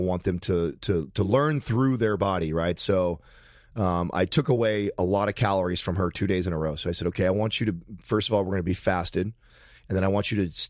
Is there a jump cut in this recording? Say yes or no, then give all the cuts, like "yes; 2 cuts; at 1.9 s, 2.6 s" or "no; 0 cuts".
no; 0 cuts